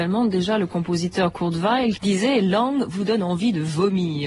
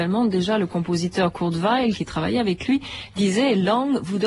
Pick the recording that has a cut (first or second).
first